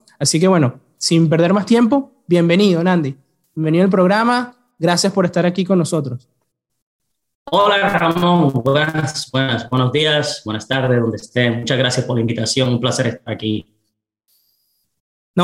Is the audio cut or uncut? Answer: uncut